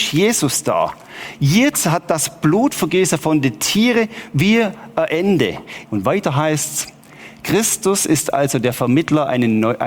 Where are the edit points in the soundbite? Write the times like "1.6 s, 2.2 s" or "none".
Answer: 5.9 s